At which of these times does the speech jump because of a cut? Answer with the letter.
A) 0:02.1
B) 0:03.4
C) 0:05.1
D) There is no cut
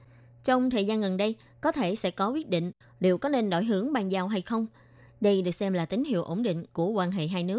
C